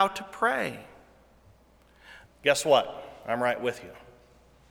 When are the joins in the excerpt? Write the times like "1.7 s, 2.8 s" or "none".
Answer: 2.3 s